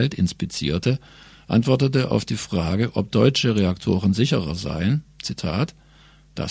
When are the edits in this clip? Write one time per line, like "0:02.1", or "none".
none